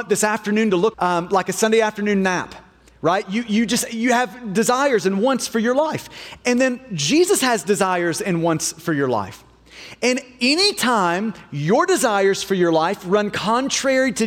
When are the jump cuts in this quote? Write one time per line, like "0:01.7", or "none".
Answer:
0:00.9